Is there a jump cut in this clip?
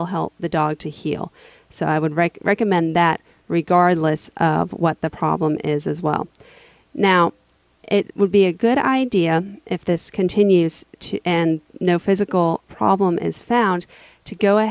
no; 0 cuts

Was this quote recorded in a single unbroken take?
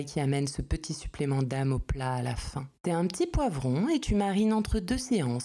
no; 1 cut; at 2.7 s

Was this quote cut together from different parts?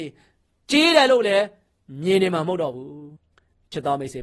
yes; 1 cut; at 3.2 s

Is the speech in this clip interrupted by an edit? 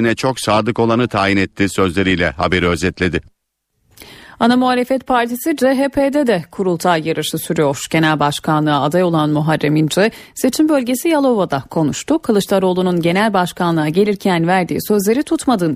no; 0 cuts

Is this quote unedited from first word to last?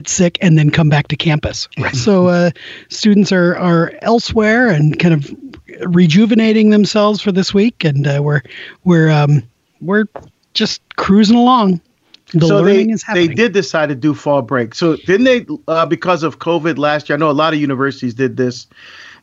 no; 1 cut; at 1.9 s

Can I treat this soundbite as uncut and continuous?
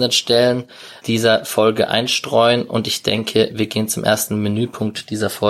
no; 1 cut; at 1.0 s

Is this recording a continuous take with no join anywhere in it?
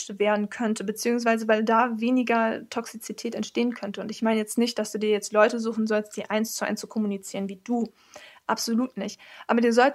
yes; 0 cuts

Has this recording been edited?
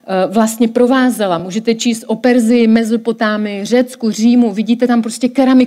no; 0 cuts

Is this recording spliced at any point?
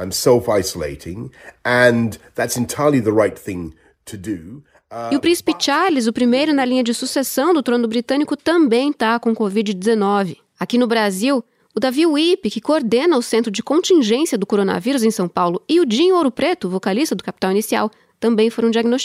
no; 0 cuts

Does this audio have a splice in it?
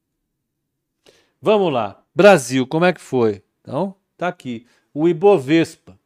no; 0 cuts

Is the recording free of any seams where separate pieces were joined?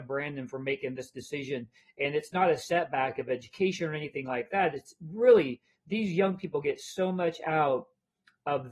yes; 0 cuts

